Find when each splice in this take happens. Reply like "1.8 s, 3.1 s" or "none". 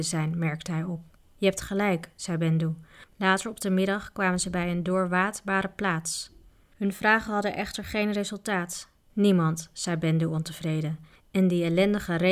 3.1 s, 6.7 s

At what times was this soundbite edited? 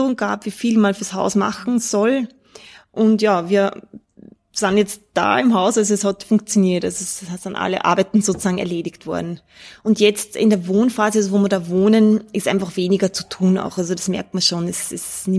none

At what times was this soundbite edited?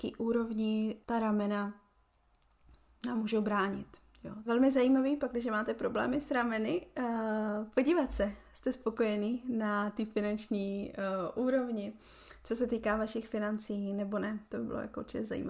1.0 s, 4.5 s

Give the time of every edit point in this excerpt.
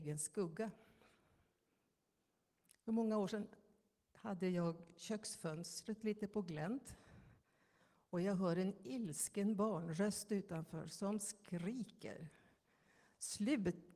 none

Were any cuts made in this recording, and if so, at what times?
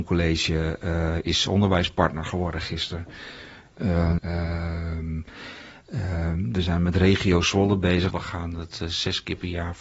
4.2 s, 8.1 s

